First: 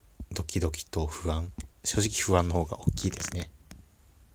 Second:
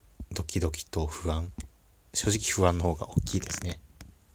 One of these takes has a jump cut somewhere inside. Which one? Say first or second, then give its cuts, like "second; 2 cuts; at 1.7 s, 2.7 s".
first; 1 cut; at 1.7 s